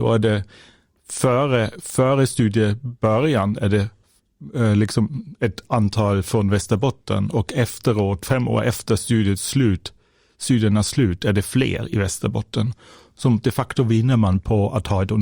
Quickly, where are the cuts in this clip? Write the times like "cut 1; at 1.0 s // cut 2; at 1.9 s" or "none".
none

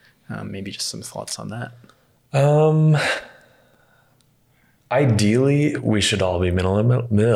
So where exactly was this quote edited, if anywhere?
none

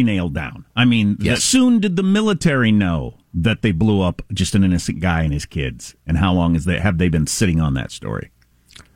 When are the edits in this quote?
cut 1; at 1.4 s // cut 2; at 6.0 s

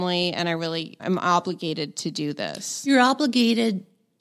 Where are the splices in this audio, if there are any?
cut 1; at 1.0 s

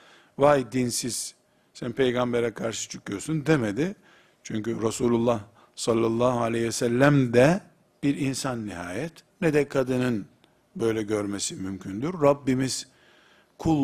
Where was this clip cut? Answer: cut 1; at 9.3 s

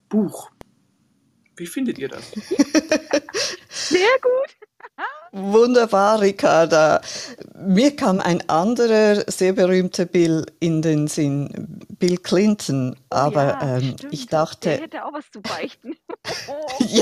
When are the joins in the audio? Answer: none

